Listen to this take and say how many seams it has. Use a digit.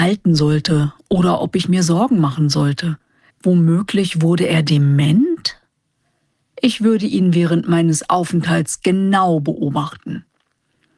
1